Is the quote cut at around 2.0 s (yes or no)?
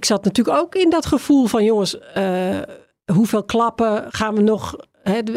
no